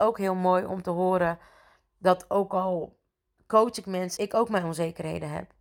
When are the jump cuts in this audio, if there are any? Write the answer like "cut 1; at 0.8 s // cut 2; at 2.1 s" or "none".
cut 1; at 4.2 s